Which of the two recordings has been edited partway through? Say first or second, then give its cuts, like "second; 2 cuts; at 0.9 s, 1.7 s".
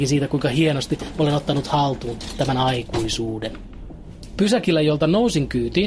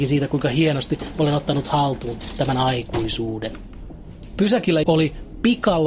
second; 1 cut; at 4.8 s